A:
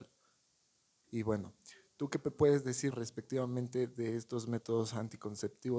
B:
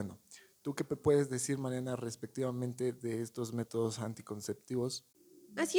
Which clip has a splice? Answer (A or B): A